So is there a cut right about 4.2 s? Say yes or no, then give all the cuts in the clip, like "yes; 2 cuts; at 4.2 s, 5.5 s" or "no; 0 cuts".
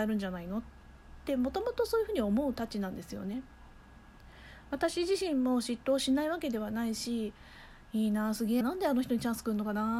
no; 1 cut; at 8.6 s